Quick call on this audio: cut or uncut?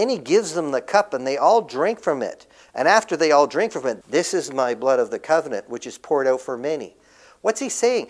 cut